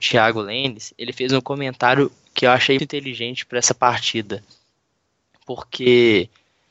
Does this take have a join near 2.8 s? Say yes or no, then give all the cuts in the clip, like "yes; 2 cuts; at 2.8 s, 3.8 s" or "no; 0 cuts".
yes; 1 cut; at 2.8 s